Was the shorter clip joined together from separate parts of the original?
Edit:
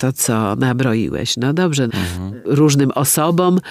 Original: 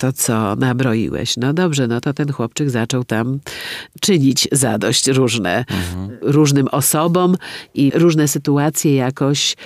yes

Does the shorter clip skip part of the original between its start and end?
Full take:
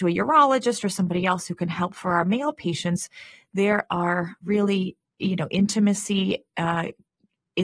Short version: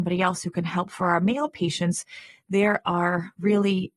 no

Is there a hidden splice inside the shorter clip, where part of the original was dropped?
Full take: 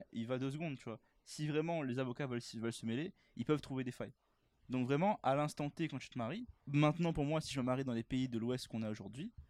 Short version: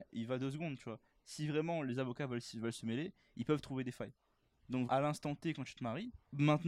yes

